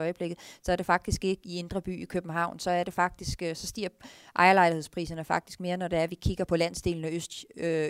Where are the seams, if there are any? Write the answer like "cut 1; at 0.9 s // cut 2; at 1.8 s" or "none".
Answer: cut 1; at 1.4 s // cut 2; at 6.5 s